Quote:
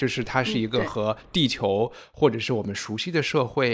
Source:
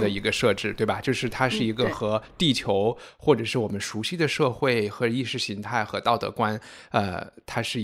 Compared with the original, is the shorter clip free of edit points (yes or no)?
yes